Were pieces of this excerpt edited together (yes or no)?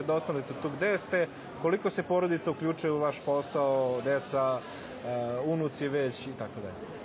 no